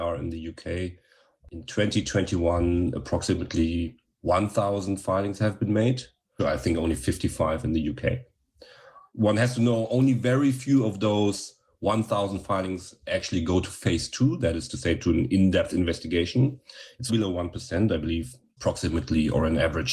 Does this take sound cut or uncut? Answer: cut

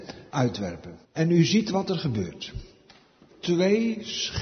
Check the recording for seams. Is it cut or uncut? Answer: cut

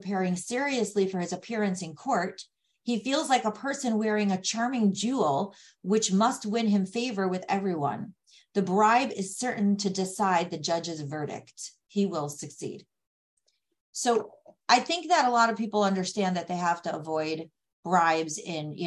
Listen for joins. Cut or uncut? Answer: uncut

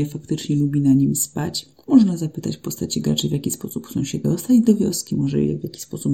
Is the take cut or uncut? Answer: cut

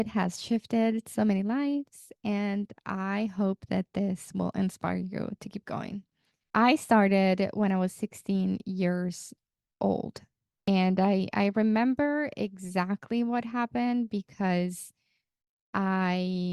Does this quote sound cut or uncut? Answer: uncut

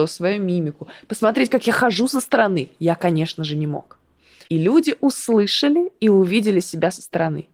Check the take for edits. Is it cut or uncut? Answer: cut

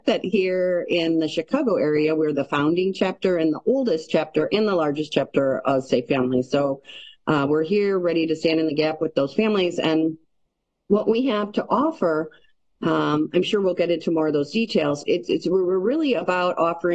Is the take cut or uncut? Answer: cut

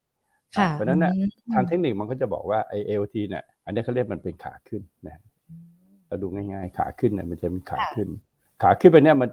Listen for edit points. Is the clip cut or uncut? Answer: cut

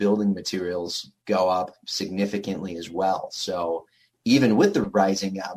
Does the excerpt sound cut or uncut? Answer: uncut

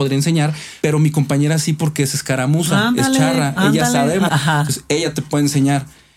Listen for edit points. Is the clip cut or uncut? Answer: cut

